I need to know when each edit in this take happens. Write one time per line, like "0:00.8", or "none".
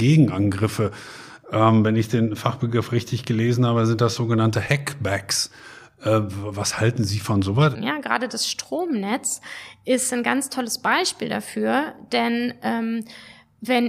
0:07.7